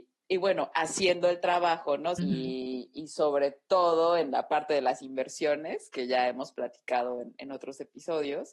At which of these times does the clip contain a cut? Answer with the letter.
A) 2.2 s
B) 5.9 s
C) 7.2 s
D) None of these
A